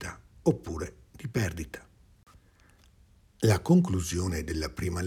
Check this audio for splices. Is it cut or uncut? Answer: uncut